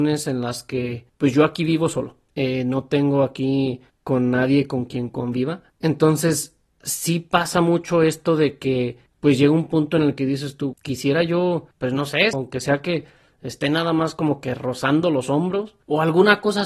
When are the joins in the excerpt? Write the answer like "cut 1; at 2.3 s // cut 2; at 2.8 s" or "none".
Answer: cut 1; at 10.7 s // cut 2; at 12.3 s